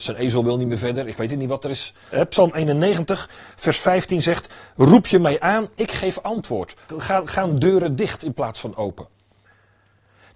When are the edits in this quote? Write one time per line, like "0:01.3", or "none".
0:02.1
0:06.9